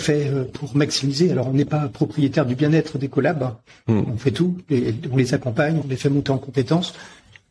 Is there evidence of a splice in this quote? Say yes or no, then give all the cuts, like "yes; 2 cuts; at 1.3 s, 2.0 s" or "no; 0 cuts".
yes; 1 cut; at 5.8 s